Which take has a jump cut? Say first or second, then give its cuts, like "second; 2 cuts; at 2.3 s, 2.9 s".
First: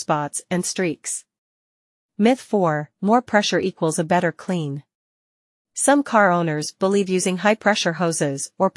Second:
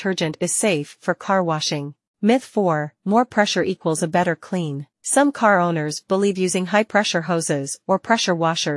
second; 2 cuts; at 2.1 s, 4.9 s